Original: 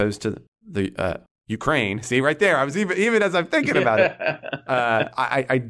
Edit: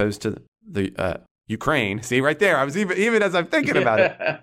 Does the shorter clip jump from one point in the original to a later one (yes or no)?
no